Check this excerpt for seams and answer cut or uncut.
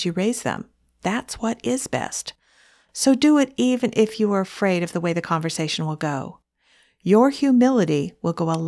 uncut